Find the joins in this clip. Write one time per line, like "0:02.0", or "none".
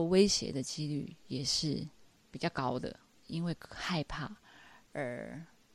0:03.2